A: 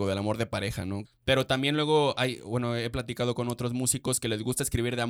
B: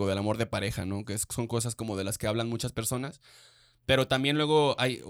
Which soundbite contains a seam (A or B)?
A